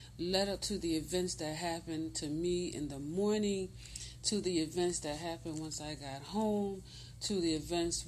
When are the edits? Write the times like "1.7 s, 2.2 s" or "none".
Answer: none